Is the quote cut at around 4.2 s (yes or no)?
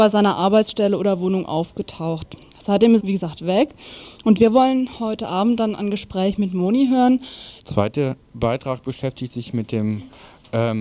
no